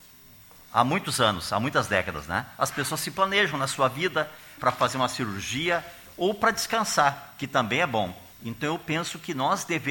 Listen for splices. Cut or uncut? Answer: cut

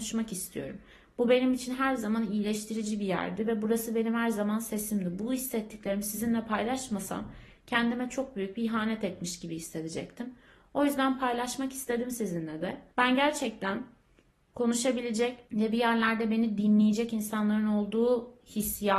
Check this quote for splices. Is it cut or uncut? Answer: cut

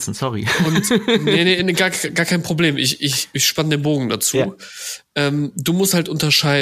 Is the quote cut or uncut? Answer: uncut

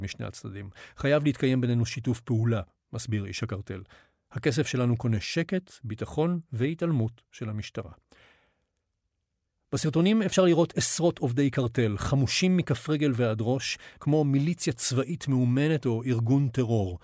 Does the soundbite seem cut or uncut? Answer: cut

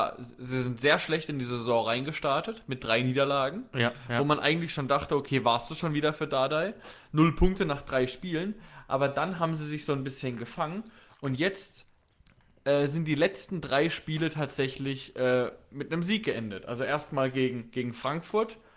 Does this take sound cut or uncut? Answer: uncut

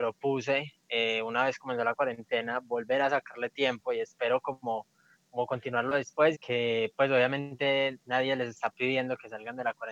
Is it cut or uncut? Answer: cut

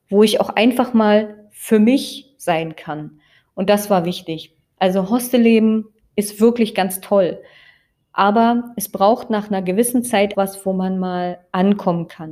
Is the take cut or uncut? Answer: cut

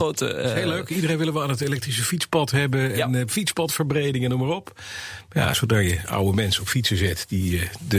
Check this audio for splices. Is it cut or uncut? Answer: uncut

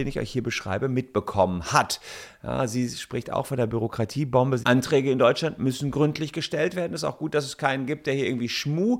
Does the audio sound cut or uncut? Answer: cut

